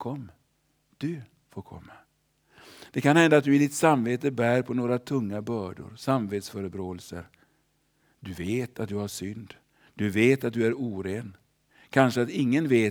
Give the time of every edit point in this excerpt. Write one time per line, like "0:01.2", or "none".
none

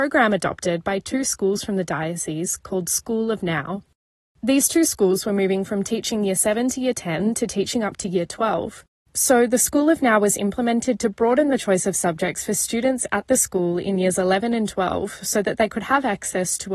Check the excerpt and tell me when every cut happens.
none

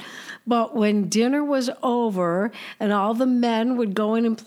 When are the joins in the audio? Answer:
none

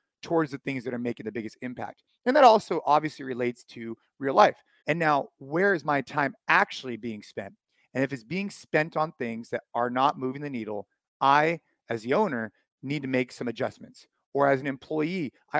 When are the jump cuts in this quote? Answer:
0:04.8

